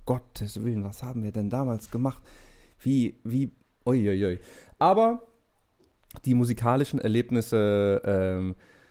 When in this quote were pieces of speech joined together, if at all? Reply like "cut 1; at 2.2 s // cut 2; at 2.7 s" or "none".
none